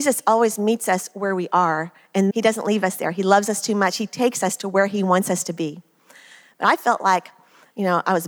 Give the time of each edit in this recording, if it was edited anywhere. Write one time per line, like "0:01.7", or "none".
0:02.3